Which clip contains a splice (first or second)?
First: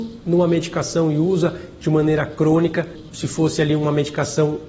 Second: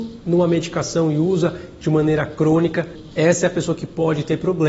second